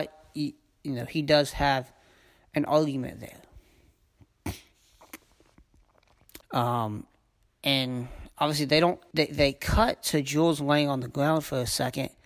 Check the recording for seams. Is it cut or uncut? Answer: cut